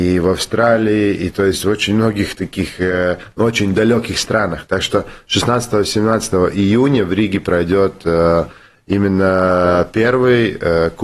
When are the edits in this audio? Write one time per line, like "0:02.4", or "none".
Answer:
none